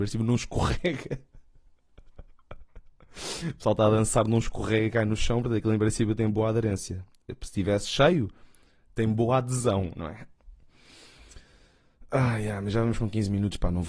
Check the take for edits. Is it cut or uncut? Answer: uncut